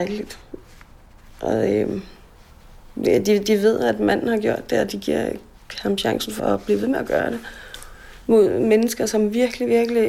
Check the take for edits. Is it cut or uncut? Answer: cut